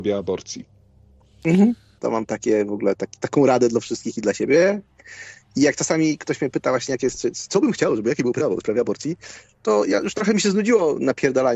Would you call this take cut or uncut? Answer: cut